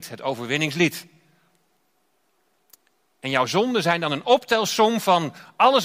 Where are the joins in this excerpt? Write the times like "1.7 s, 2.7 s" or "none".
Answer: none